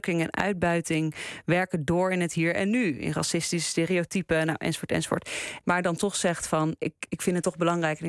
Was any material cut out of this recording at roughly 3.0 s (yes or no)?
no